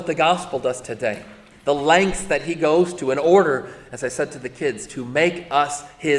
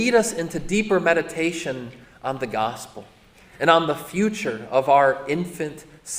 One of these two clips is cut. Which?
first; 1 cut; at 1.5 s

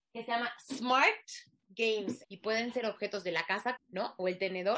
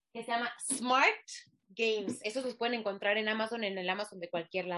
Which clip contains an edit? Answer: first; 2 cuts; at 2.2 s, 3.8 s

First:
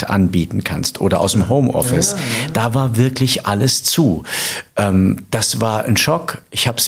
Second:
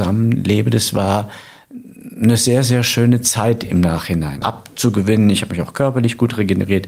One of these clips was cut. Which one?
second; 1 cut; at 4.4 s

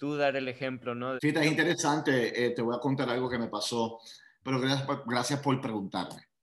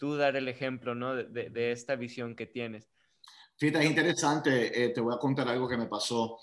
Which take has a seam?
first; 2 cuts; at 1.2 s, 4.4 s

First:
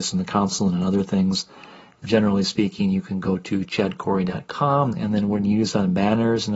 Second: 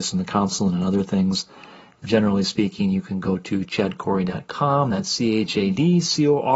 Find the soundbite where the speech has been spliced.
first; 1 cut; at 4.9 s

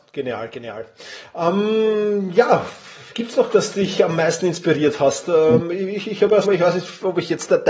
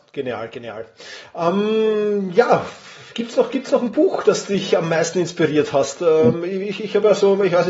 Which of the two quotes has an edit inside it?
first; 2 cuts; at 3.5 s, 6.4 s

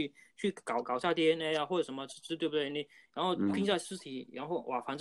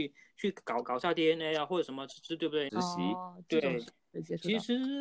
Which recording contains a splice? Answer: second; 1 cut; at 2.7 s

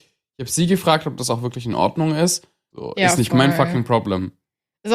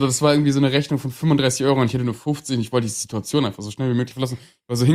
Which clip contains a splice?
first; 1 cut; at 2.7 s

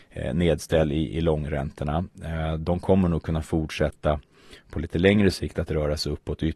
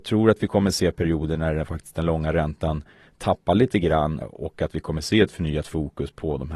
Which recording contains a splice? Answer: second; 1 cut; at 4.2 s

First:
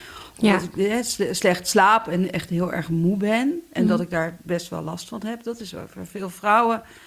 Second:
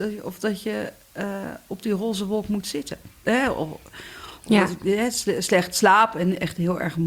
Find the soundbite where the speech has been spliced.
second; 1 cut; at 3.2 s

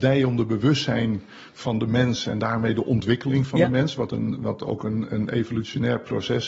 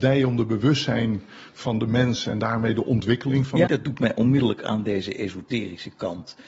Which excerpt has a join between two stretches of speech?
second; 1 cut; at 3.7 s

